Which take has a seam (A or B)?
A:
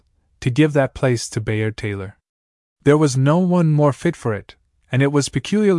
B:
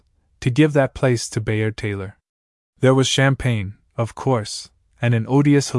B